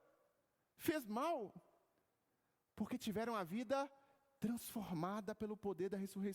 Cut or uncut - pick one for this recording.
uncut